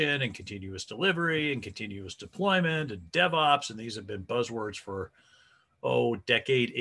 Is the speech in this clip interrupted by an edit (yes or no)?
no